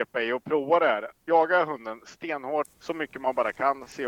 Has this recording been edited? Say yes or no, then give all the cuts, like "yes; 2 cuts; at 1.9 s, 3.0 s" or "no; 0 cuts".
yes; 1 cut; at 2.7 s